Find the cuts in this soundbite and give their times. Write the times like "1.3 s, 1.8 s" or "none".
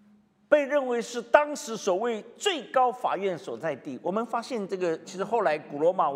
5.0 s